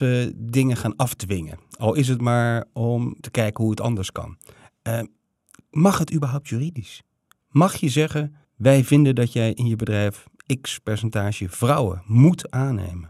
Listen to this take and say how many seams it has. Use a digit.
2